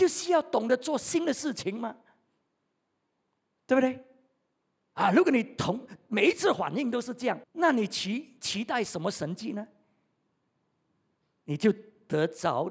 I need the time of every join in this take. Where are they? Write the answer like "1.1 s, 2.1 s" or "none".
7.4 s